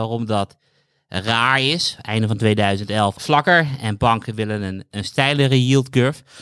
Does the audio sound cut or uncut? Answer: cut